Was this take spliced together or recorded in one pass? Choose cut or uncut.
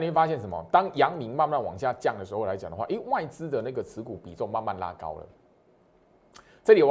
uncut